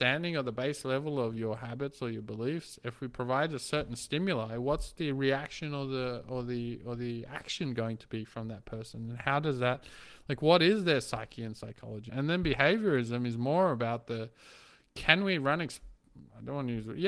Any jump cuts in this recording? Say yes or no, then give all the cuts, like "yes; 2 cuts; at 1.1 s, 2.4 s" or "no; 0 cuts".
yes; 1 cut; at 12.1 s